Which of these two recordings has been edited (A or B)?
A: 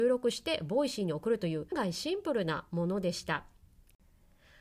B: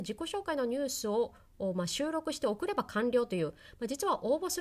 A